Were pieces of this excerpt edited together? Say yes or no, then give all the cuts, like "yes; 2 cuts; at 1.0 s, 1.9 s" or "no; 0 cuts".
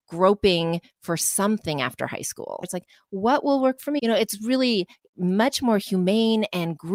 yes; 2 cuts; at 2.6 s, 4.0 s